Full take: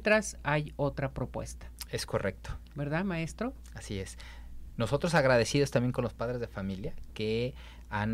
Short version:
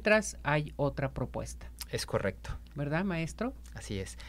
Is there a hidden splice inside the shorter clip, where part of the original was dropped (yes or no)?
no